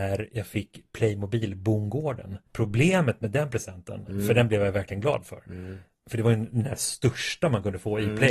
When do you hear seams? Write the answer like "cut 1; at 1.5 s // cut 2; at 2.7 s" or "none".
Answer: cut 1; at 2.5 s

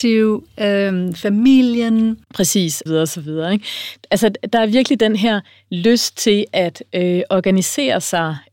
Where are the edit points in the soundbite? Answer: cut 1; at 2.9 s

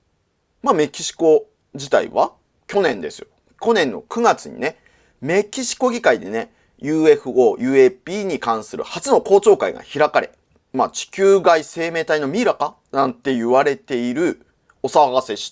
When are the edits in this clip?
cut 1; at 2.7 s

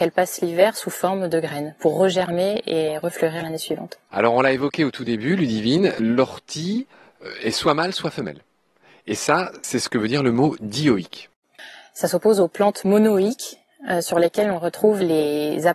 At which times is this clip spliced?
cut 1; at 4.1 s

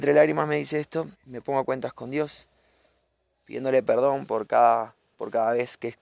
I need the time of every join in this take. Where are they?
cut 1; at 1.2 s

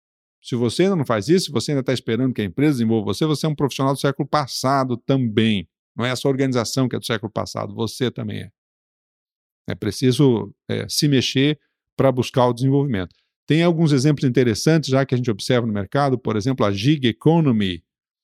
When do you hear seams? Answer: none

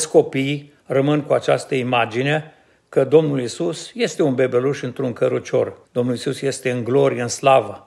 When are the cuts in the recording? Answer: cut 1; at 5.8 s

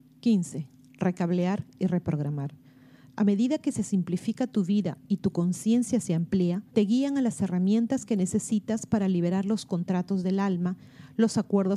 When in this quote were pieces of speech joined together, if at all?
cut 1; at 3.1 s // cut 2; at 6.7 s

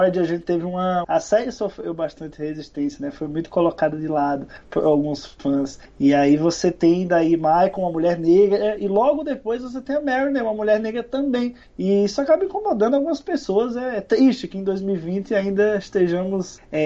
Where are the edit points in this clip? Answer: cut 1; at 1.0 s

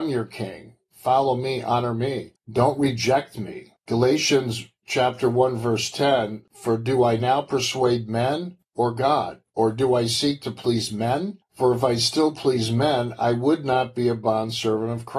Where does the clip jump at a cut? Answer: none

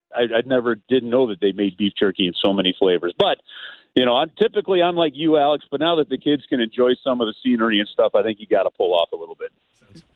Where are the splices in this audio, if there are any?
none

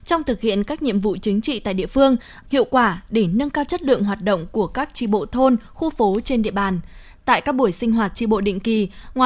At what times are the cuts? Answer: cut 1; at 2.4 s

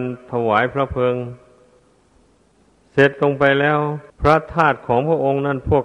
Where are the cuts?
cut 1; at 4.1 s

